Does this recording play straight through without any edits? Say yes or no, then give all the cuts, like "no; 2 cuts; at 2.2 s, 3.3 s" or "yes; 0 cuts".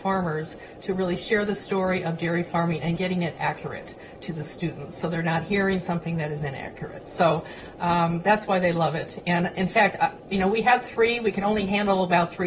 yes; 0 cuts